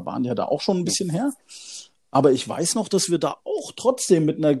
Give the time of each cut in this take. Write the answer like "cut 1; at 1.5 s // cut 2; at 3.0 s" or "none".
none